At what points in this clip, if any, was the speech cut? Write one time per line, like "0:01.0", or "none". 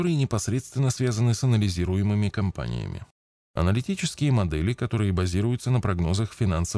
none